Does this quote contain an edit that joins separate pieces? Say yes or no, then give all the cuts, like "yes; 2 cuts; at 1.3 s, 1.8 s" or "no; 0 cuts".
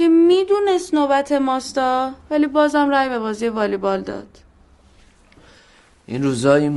no; 0 cuts